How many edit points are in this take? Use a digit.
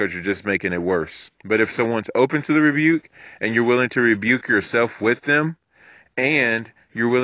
1